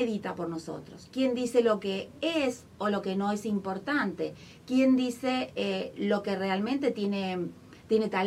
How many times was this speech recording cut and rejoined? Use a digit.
0